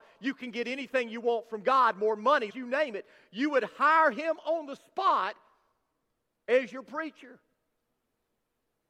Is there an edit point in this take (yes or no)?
yes